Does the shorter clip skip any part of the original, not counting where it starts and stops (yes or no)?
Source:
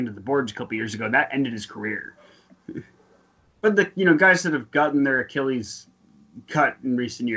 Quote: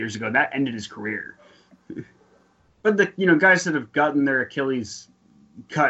no